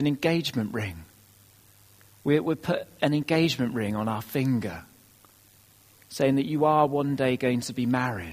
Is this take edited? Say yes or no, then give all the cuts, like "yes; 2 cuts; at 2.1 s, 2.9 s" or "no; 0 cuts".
no; 0 cuts